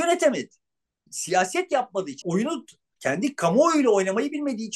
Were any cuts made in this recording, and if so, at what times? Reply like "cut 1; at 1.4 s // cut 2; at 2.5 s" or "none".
cut 1; at 2.2 s